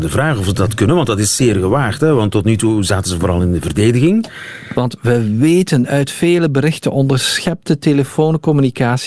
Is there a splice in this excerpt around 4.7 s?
yes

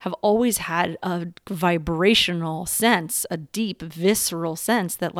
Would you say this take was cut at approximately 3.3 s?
no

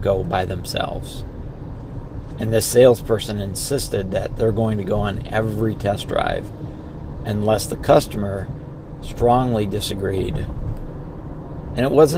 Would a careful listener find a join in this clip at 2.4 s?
no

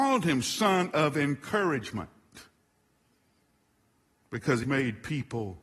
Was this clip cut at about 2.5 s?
no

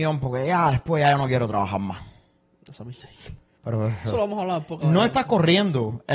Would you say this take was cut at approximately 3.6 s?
yes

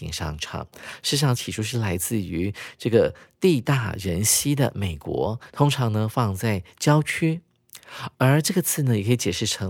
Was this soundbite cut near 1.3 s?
yes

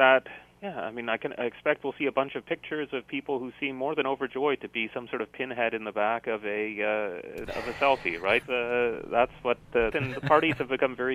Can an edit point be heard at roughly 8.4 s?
yes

